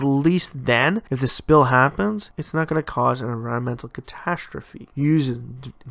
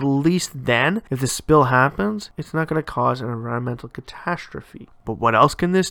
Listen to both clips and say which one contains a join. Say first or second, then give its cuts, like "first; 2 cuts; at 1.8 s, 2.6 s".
second; 1 cut; at 4.9 s